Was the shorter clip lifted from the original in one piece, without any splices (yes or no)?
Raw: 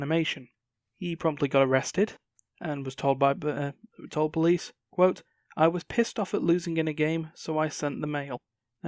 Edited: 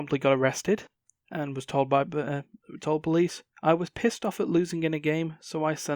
no